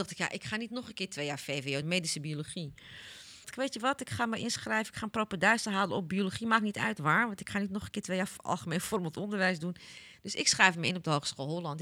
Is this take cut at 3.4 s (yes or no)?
yes